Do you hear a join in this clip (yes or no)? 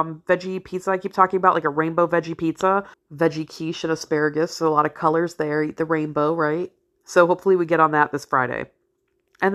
yes